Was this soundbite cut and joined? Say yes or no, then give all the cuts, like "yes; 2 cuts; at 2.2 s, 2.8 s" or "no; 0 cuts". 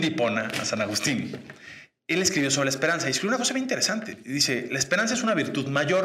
yes; 1 cut; at 2.0 s